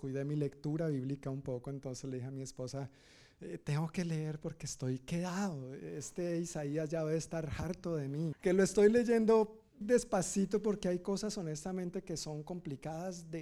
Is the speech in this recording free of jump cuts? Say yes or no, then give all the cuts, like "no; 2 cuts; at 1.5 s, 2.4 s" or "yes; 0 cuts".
no; 2 cuts; at 8.3 s, 9.8 s